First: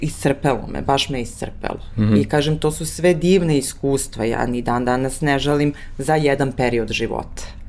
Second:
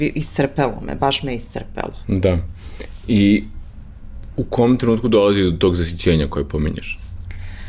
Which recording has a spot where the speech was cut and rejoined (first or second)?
second